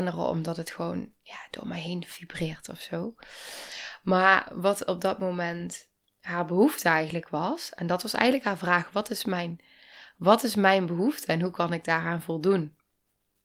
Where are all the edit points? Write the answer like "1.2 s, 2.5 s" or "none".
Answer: 6.0 s

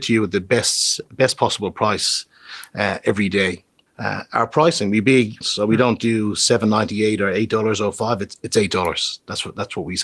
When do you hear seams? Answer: 5.4 s

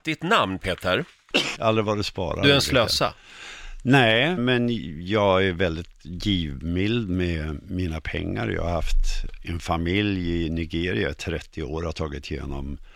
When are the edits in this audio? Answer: 1.5 s, 4.4 s

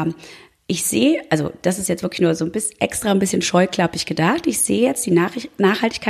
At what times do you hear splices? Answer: none

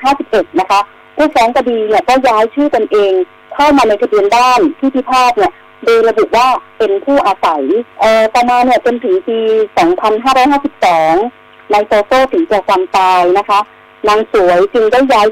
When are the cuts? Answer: 7.9 s

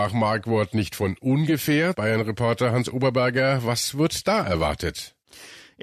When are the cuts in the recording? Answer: 1.9 s

